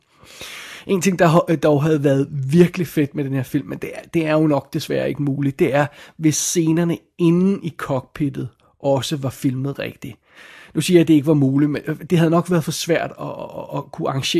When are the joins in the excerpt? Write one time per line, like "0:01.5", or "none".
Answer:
0:12.1